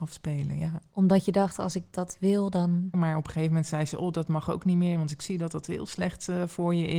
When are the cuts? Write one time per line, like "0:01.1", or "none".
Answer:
0:02.9